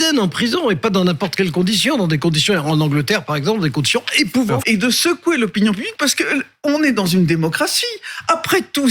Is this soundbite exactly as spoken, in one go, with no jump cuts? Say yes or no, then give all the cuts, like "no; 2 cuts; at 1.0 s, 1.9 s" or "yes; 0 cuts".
no; 1 cut; at 4.6 s